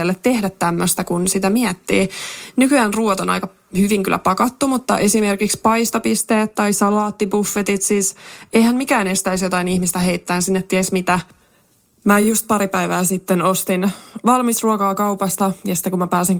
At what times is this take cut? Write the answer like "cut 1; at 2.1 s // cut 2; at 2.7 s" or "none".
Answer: none